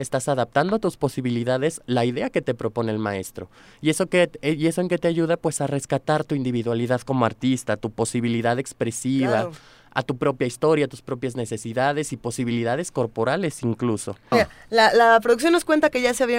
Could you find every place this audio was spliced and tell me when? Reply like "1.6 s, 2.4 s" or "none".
14.3 s